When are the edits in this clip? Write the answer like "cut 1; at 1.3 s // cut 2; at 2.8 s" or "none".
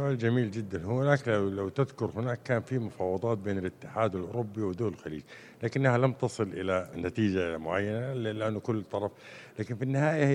cut 1; at 6.9 s